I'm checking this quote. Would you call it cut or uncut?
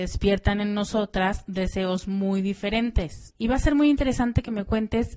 cut